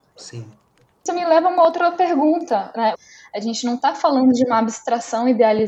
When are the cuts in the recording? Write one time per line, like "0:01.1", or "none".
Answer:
0:02.9